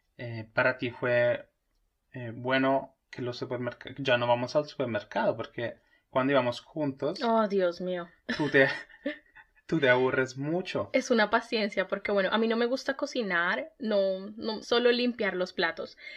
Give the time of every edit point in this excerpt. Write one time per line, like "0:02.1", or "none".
0:14.6